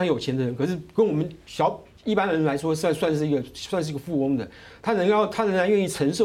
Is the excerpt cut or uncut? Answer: uncut